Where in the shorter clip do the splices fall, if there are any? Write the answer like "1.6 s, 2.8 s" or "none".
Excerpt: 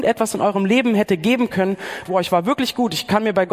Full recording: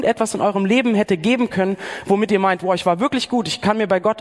2.0 s